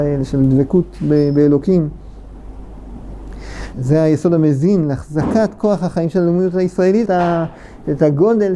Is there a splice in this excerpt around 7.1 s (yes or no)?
yes